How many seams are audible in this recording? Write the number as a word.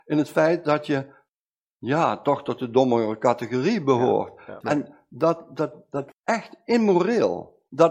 two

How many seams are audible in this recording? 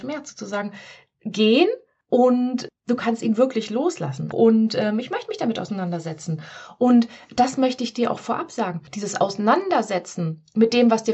one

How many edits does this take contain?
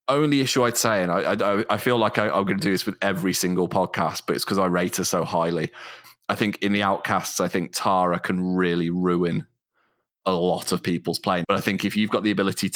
one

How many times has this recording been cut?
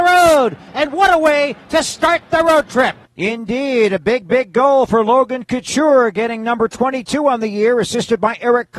zero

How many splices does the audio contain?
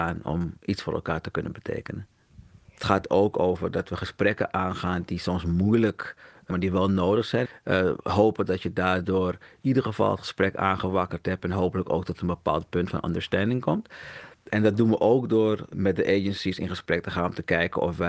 one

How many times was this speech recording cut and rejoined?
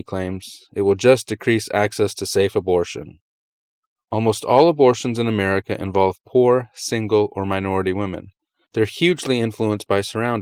two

